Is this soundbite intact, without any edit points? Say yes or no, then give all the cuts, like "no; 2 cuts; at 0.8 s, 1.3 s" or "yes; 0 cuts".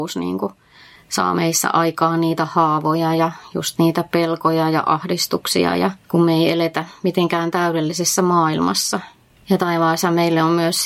yes; 0 cuts